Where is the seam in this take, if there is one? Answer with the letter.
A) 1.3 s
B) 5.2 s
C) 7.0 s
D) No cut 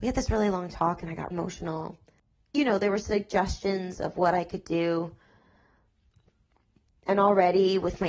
A